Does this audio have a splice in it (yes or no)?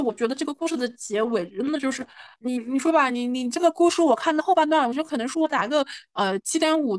no